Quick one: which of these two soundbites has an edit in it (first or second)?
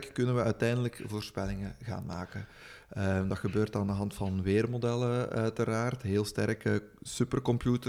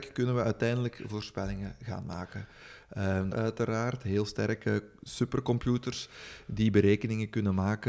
second